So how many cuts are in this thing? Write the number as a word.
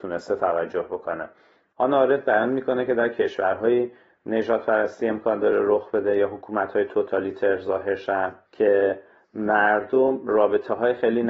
zero